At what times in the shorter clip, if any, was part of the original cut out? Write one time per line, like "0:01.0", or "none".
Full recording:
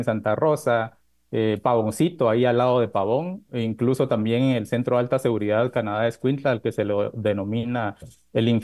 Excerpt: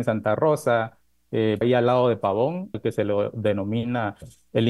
0:01.6
0:02.7